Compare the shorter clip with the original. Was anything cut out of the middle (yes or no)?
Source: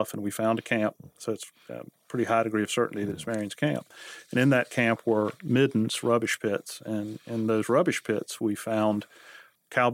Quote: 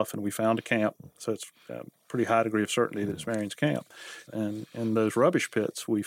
yes